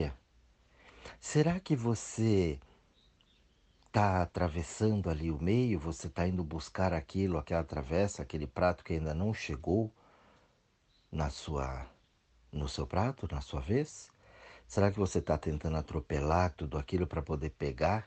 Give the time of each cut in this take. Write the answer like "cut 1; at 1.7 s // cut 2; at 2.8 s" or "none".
none